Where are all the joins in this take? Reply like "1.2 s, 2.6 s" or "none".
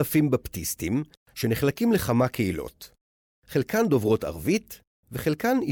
none